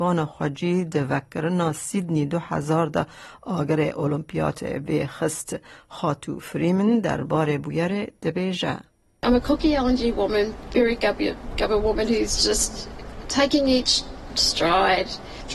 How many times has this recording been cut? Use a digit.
0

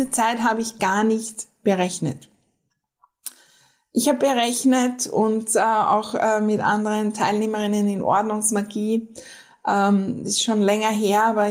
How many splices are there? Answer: 0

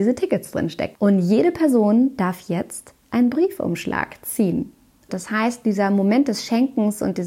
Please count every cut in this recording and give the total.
2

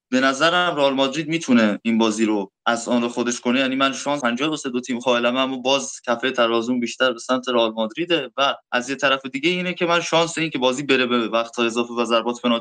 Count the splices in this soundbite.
2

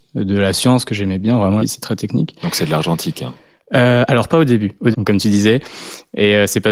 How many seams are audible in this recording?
2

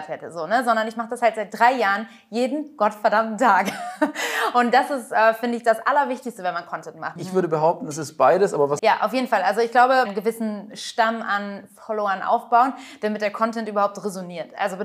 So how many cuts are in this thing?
3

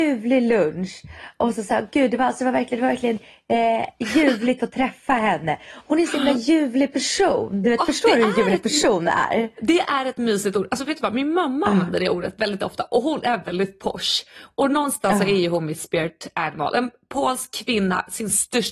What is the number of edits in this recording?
0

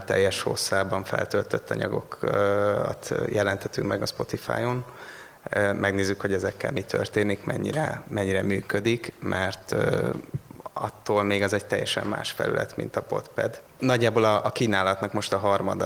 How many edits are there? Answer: 0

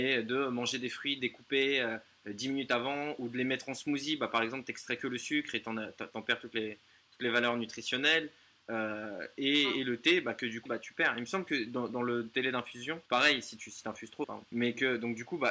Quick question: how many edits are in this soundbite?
3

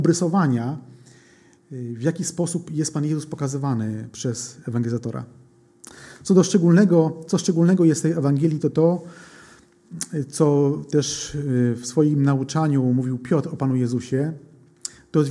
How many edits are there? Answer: 0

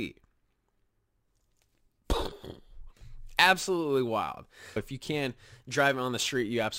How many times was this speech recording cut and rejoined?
1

